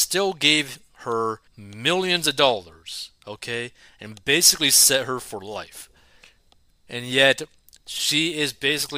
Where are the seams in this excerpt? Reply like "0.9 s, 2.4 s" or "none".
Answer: 1.5 s